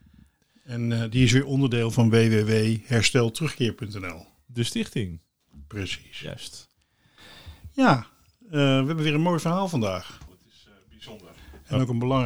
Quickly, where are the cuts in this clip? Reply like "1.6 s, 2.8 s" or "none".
10.3 s

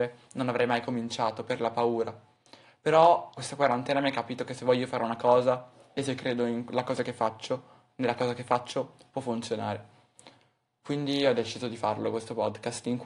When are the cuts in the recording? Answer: 3.4 s

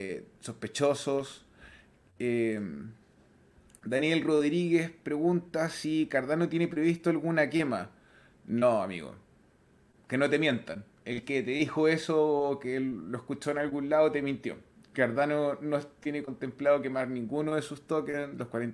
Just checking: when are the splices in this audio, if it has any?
none

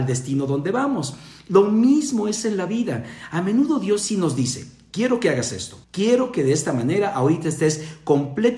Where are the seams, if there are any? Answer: 5.8 s

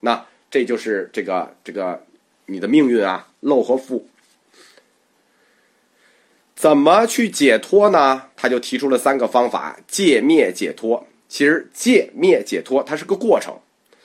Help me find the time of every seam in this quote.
none

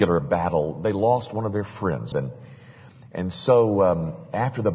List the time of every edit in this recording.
2.1 s

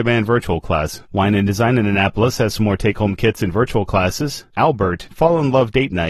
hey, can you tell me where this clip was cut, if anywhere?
1.0 s, 4.5 s

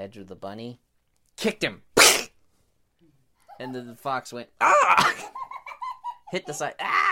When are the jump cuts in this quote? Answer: none

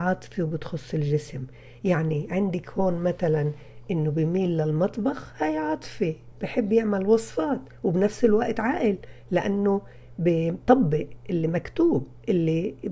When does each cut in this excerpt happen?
6.3 s

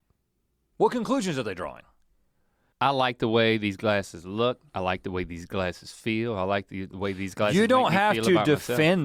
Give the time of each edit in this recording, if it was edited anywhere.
2.7 s

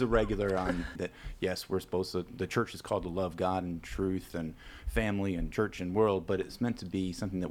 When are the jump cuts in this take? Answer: 0.9 s

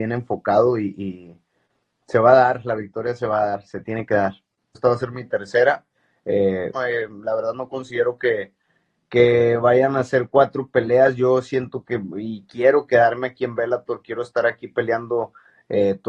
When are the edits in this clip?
4.7 s, 6.7 s

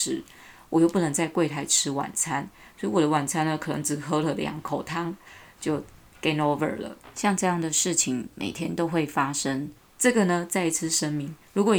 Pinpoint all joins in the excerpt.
none

